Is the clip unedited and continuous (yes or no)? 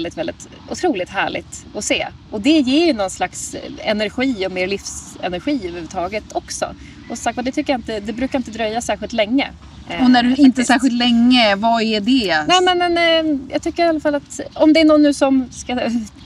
yes